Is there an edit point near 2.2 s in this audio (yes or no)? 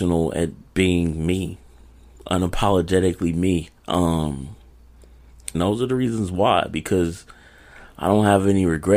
no